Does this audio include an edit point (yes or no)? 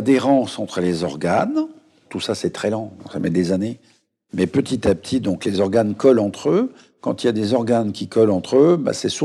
no